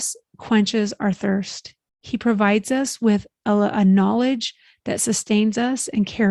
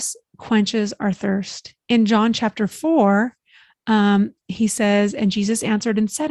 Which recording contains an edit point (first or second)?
second